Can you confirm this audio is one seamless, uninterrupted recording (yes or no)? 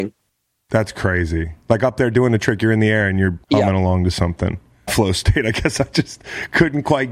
no